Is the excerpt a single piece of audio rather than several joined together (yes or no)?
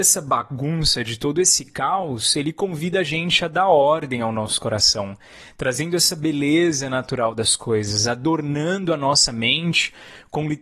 yes